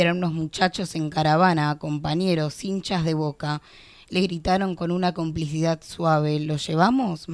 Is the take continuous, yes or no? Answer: yes